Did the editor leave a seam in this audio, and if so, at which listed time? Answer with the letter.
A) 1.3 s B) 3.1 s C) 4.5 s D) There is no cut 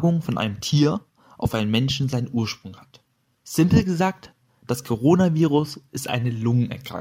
D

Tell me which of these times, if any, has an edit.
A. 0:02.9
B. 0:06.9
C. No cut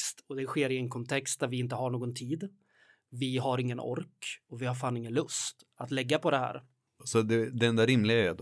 C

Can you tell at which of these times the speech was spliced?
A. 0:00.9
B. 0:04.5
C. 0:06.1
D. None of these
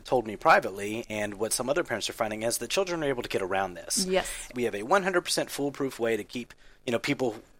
B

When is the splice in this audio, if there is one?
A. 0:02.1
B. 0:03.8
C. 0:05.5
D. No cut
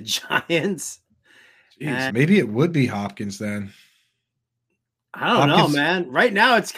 A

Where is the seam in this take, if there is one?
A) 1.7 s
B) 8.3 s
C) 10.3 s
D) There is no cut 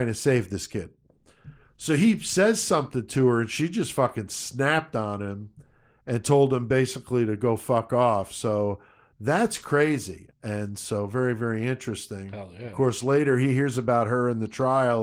C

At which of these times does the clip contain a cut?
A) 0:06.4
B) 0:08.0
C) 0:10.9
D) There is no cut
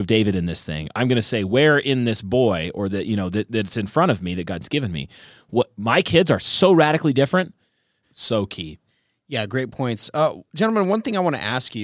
B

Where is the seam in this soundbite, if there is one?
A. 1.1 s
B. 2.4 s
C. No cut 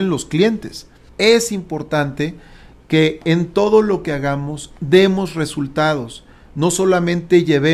A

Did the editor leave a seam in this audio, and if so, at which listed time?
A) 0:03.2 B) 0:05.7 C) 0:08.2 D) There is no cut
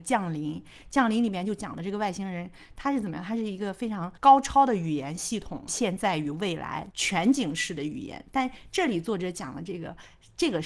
B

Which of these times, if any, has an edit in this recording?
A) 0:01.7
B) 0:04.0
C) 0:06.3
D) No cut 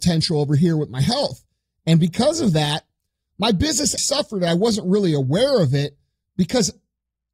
B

